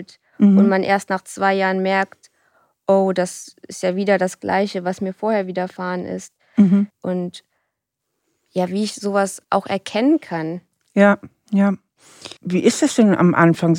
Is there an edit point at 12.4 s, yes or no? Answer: yes